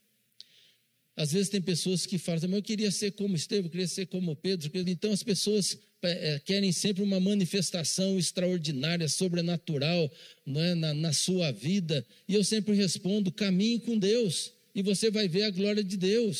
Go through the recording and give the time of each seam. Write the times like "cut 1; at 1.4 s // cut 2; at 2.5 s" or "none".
cut 1; at 4.8 s